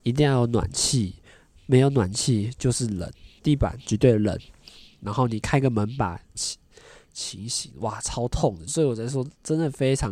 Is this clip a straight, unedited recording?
no; 2 cuts; at 6.3 s, 8.7 s

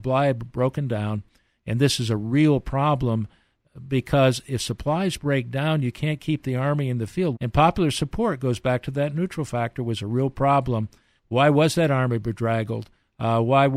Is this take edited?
yes; 2 cuts; at 7.3 s, 11.2 s

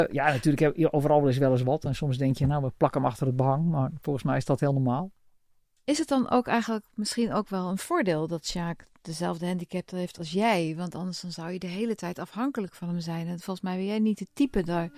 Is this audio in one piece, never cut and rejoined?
yes; 0 cuts

